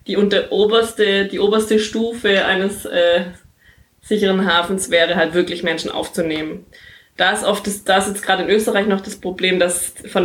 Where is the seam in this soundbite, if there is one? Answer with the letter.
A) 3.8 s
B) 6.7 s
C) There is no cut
C